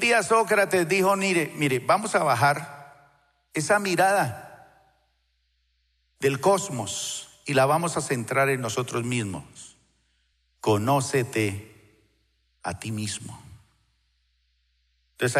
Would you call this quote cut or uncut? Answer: uncut